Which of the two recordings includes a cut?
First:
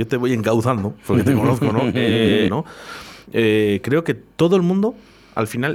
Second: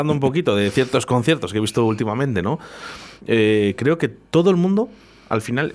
first; 1 cut; at 2.5 s

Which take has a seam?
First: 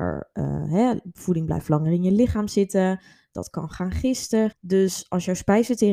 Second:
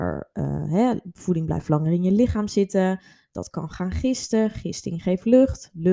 first; 1 cut; at 4.5 s

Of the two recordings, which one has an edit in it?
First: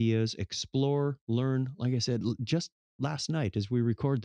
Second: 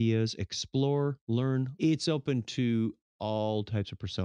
second; 1 cut; at 1.8 s

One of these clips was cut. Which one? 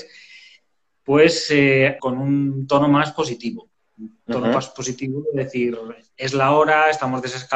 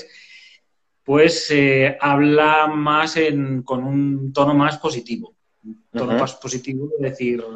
first; 1 cut; at 2.0 s

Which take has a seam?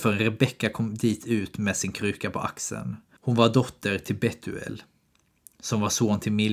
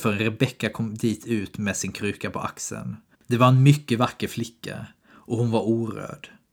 second; 1 cut; at 3.1 s

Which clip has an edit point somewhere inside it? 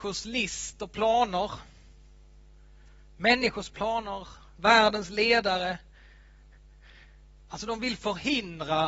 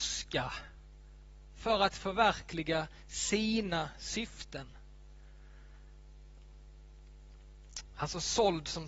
first; 1 cut; at 7.4 s

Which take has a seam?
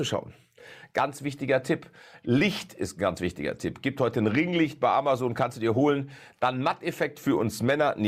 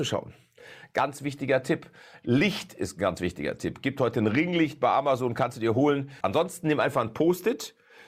second; 1 cut; at 6.2 s

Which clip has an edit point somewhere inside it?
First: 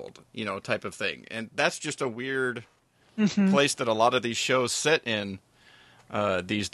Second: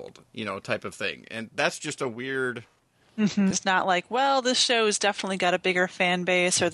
second; 1 cut; at 3.5 s

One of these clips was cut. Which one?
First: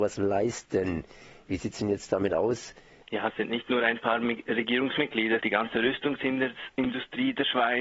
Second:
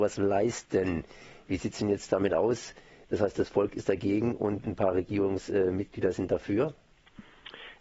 first; 2 cuts; at 3.0 s, 5.4 s

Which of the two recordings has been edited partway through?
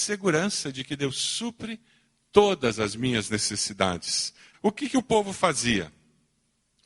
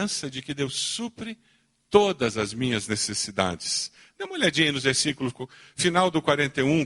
first; 1 cut; at 4.5 s

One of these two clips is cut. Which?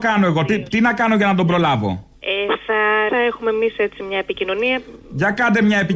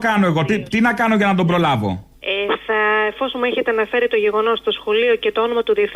first; 1 cut; at 3.1 s

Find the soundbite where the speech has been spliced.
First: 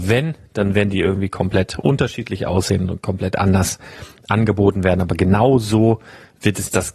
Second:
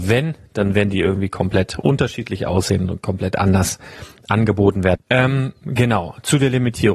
second; 1 cut; at 5.0 s

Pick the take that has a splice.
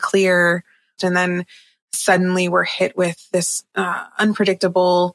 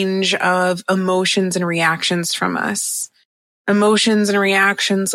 first; 1 cut; at 1.0 s

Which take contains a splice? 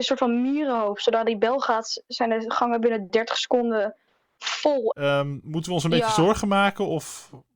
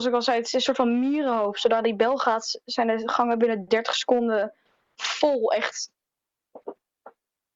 first; 1 cut; at 4.9 s

